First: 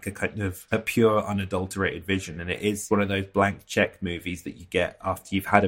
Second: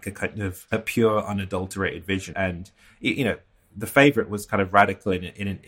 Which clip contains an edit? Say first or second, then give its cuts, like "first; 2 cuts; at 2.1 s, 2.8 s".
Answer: second; 1 cut; at 2.3 s